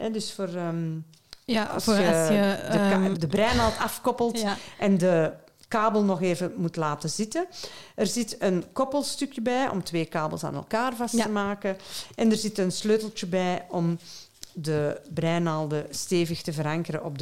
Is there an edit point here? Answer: yes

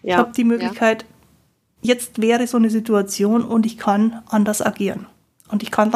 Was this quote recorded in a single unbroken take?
yes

